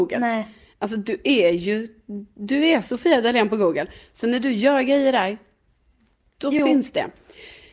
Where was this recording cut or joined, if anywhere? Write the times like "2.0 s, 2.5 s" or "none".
none